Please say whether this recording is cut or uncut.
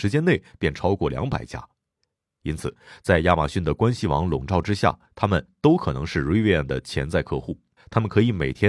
cut